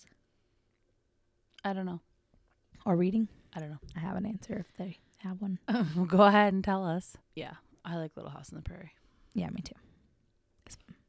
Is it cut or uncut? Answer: cut